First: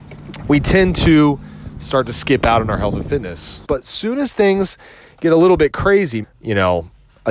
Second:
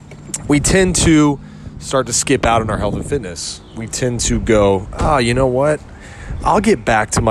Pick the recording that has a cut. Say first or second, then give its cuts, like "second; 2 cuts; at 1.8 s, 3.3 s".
first; 2 cuts; at 3.6 s, 6.2 s